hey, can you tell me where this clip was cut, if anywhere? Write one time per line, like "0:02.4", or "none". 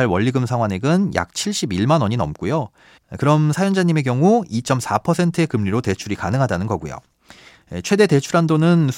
0:03.0